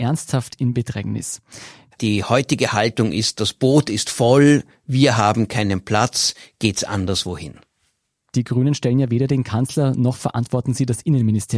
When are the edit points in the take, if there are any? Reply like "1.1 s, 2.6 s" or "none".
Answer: 1.9 s, 8.3 s